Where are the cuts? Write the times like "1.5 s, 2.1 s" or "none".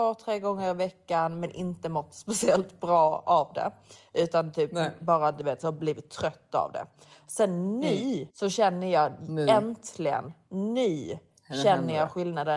8.3 s

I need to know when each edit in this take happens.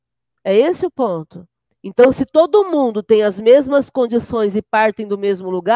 1.7 s

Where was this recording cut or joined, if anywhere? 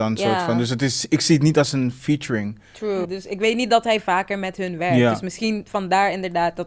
3.0 s

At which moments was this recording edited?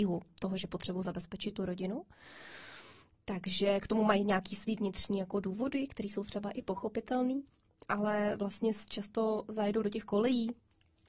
none

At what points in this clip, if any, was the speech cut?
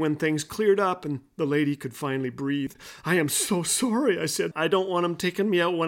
4.5 s

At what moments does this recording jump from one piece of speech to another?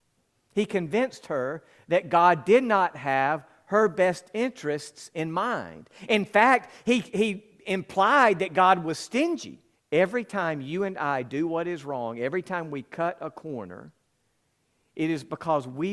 9.8 s

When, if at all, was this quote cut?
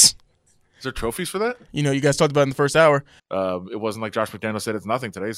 1.7 s, 3.2 s

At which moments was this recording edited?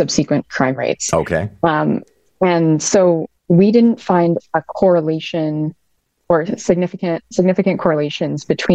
3.4 s, 7.3 s

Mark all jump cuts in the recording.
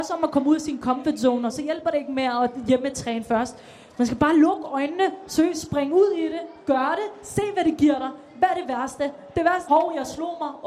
1.5 s, 9.7 s

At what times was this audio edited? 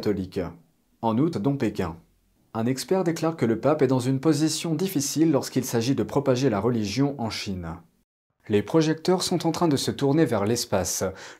1.3 s, 8.4 s

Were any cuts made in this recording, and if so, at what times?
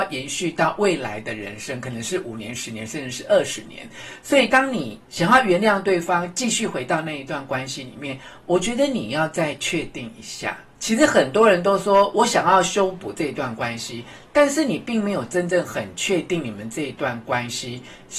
5.0 s, 10.7 s

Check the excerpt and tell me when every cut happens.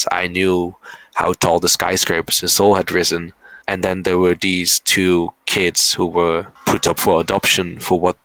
3.6 s, 6.6 s

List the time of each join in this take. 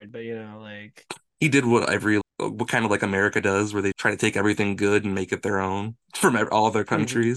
2.2 s, 3.9 s

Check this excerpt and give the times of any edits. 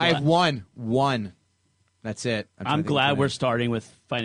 none

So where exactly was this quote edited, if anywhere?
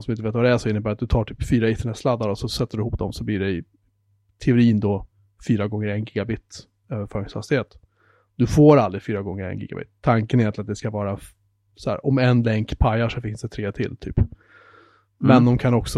none

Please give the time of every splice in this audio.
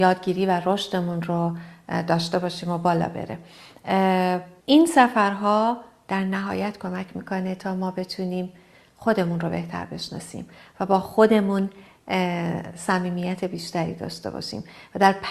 4.6 s

